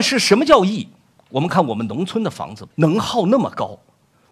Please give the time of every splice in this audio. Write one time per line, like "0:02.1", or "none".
0:01.5
0:02.7